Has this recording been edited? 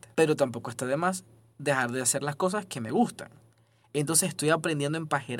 no; 0 cuts

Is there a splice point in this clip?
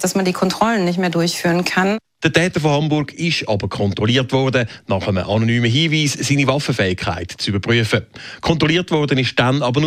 no; 0 cuts

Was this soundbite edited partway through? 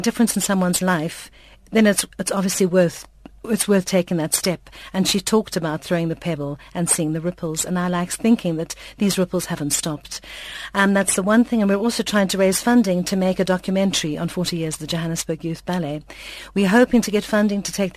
no; 0 cuts

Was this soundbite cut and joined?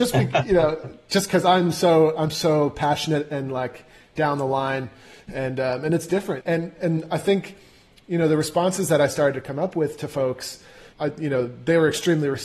yes; 2 cuts; at 6.4 s, 10.9 s

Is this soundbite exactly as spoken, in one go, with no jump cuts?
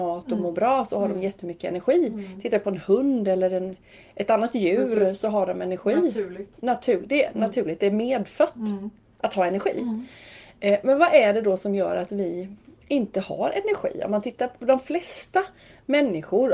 yes; 0 cuts

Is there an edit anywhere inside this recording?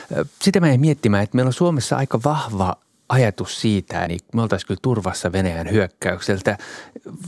yes; 1 cut; at 4.1 s

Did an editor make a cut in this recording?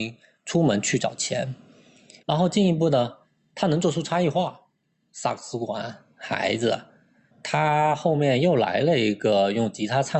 yes; 2 cuts; at 2.2 s, 7.3 s

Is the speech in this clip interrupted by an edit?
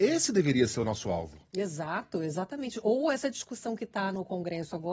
no; 0 cuts

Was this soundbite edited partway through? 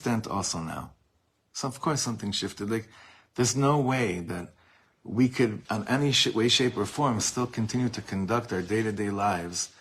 yes; 1 cut; at 5.6 s

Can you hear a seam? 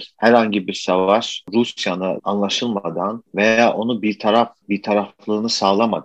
yes; 1 cut; at 2.2 s

